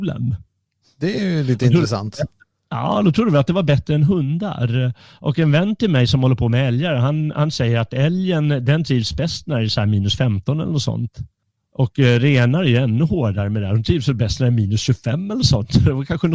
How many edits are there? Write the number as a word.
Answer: zero